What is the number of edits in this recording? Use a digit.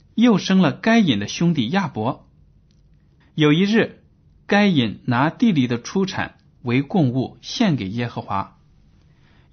1